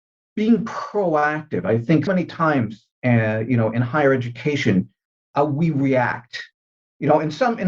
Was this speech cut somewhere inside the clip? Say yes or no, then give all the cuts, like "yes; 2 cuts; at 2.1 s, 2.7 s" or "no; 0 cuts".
yes; 1 cut; at 2.1 s